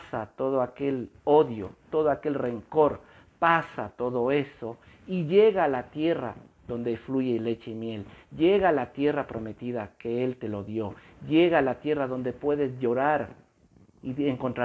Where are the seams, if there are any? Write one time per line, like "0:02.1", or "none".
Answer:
none